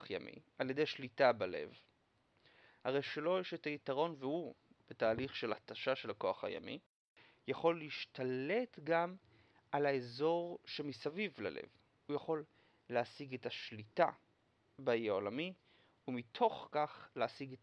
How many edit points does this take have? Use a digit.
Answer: 1